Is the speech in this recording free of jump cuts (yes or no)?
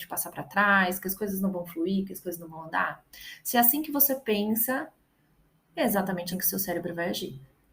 no